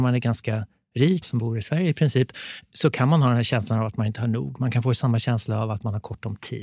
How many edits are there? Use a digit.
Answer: 1